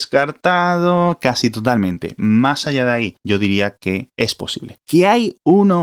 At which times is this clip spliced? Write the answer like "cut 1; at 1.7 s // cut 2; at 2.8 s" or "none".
none